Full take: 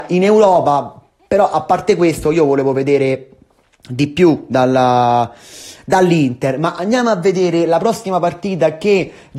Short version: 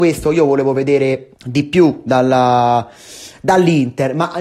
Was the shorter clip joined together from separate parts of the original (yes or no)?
yes